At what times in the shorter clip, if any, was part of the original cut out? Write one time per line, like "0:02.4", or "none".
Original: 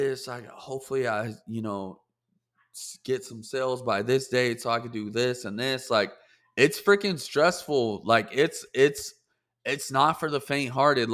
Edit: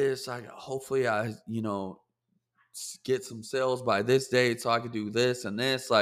none